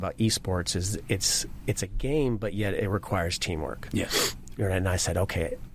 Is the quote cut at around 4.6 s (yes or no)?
yes